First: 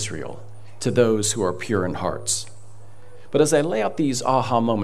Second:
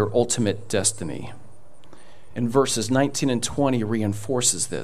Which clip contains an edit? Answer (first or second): second